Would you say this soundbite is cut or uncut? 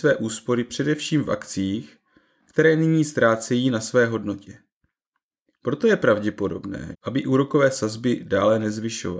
cut